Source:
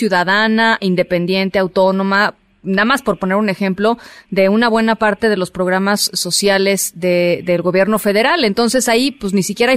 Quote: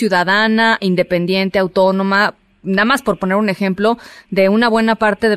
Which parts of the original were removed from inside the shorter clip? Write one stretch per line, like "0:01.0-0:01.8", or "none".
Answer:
none